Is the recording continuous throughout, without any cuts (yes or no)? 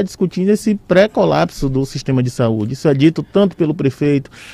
yes